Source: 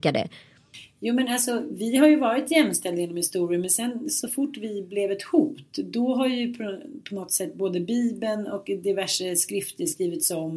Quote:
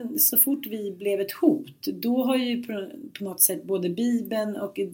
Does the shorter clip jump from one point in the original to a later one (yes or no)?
no